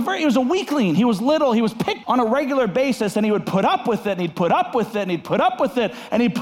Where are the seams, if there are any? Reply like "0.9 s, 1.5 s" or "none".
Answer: 2.0 s